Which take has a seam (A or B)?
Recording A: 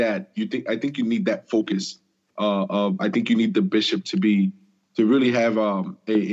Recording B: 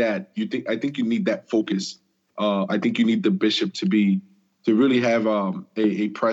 B